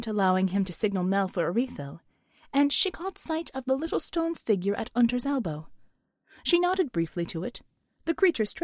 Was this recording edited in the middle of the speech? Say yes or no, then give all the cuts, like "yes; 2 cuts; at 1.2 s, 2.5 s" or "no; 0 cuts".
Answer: no; 0 cuts